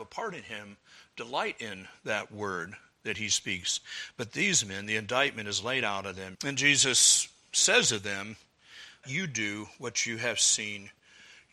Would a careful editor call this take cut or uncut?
cut